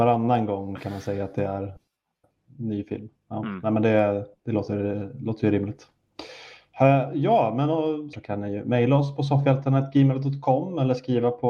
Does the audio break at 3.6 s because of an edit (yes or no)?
no